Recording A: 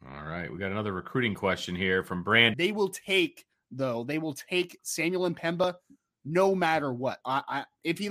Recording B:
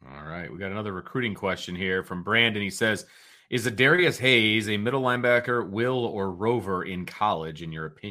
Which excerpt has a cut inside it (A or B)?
A